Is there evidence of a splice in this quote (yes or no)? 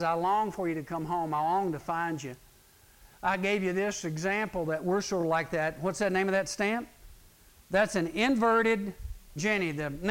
no